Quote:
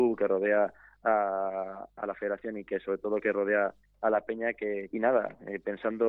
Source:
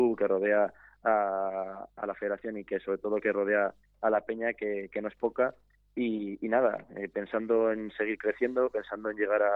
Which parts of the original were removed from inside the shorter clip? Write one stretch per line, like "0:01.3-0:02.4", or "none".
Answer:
0:04.9-0:06.4